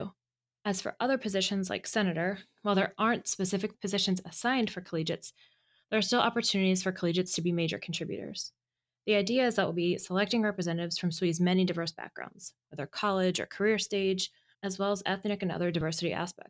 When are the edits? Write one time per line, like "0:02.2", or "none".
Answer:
0:14.5